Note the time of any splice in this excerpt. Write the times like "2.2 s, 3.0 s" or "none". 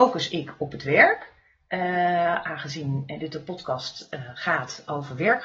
none